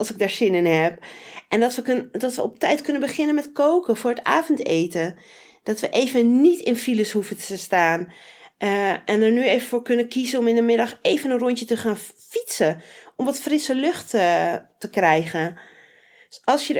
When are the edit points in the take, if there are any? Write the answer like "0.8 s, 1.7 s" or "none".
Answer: none